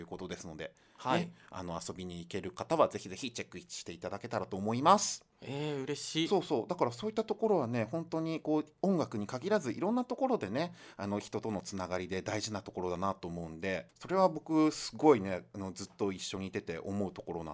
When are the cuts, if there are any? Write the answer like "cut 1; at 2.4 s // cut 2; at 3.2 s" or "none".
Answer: cut 1; at 5.3 s // cut 2; at 13.9 s